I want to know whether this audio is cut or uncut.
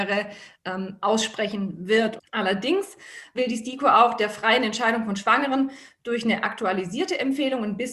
cut